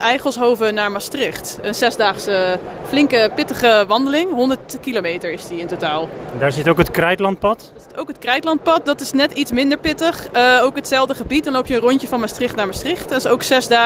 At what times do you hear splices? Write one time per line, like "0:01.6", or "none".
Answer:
none